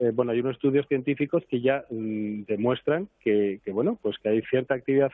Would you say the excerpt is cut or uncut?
uncut